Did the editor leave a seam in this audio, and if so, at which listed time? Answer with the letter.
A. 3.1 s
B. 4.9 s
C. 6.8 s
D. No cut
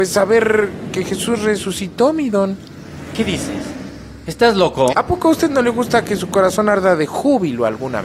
B